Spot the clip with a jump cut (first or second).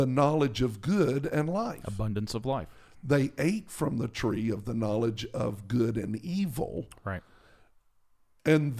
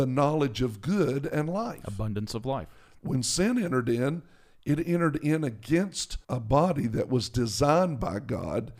second